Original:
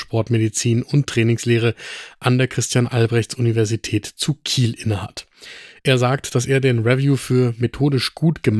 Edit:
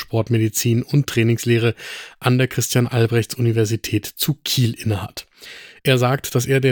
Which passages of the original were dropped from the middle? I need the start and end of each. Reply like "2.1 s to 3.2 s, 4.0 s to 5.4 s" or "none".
none